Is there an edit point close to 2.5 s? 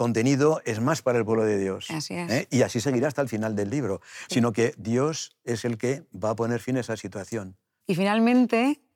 no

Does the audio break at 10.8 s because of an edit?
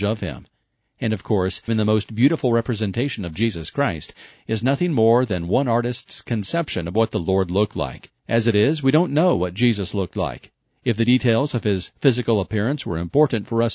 no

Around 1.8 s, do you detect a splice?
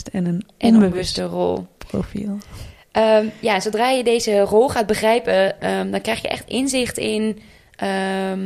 no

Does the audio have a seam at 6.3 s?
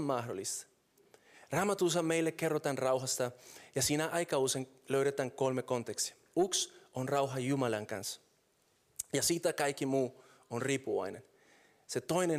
no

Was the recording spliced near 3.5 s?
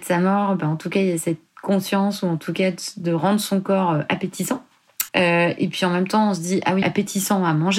no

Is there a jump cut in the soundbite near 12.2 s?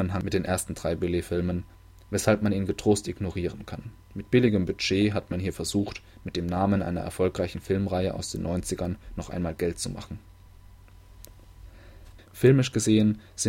yes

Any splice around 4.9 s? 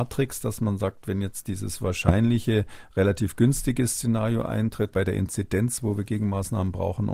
yes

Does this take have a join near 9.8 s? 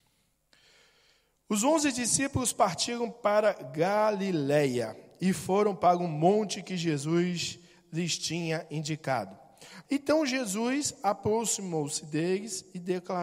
yes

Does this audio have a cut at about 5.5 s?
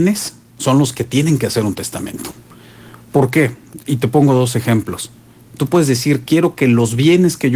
yes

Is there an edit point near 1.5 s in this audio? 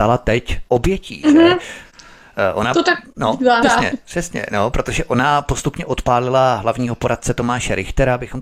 no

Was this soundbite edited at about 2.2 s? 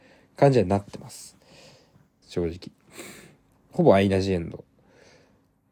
yes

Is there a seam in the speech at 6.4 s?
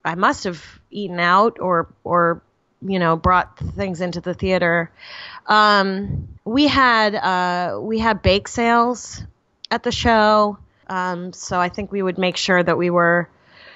yes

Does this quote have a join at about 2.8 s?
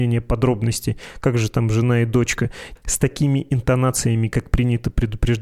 yes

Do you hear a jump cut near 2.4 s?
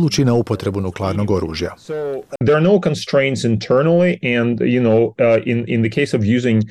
yes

